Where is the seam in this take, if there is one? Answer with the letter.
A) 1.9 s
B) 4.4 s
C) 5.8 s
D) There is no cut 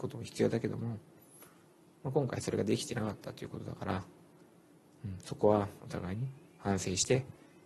C